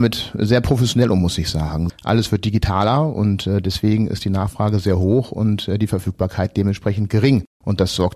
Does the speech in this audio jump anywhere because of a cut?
yes; 1 cut; at 1.9 s

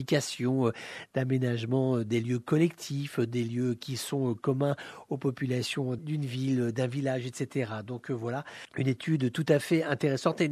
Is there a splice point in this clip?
no; 0 cuts

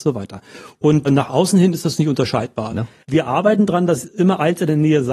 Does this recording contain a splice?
yes; 2 cuts; at 1.1 s, 2.7 s

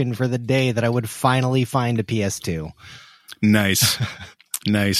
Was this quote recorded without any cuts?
yes; 0 cuts

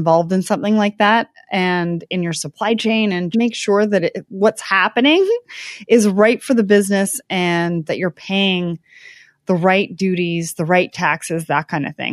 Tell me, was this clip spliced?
yes; 2 cuts; at 3.3 s, 7.9 s

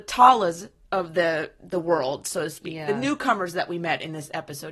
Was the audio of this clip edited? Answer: no; 0 cuts

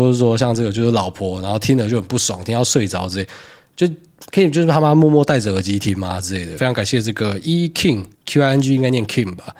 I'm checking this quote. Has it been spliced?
yes; 2 cuts; at 6.6 s, 8.1 s

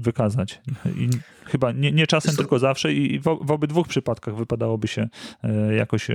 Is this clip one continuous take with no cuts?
yes; 0 cuts

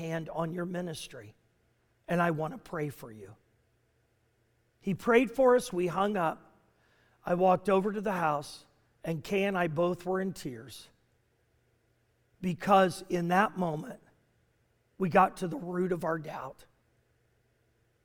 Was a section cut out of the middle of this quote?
no; 0 cuts

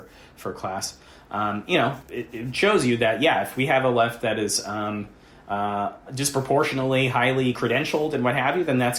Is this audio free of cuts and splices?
no; 2 cuts; at 2.0 s, 6.1 s

